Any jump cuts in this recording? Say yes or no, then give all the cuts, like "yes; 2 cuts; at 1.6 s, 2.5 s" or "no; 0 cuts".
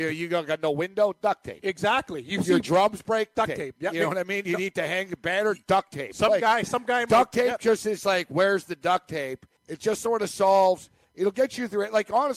yes; 2 cuts; at 3.4 s, 9.6 s